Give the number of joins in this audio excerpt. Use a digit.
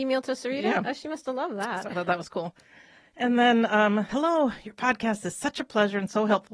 1